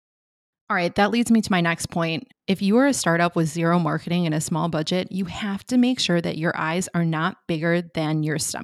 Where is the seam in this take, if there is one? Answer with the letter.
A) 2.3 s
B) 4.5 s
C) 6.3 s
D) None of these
A